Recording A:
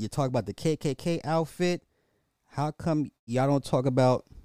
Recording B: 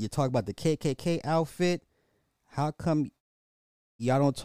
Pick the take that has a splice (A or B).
A